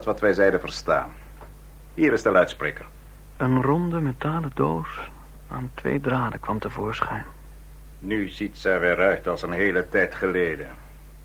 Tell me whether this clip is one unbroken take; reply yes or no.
no